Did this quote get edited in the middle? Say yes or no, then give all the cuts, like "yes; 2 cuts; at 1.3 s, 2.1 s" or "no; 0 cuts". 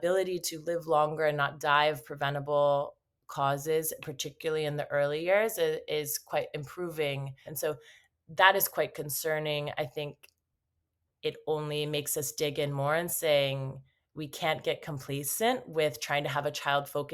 yes; 1 cut; at 7.5 s